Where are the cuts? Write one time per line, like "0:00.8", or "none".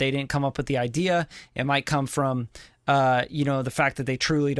none